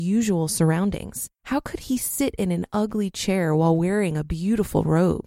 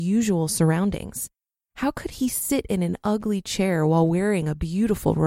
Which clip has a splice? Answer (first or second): first